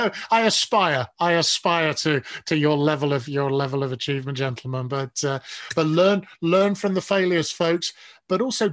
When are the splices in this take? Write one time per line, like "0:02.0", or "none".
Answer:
none